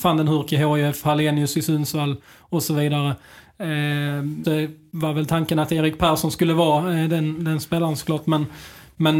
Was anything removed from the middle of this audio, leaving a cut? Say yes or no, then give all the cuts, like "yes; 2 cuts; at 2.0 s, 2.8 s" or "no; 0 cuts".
yes; 1 cut; at 4.4 s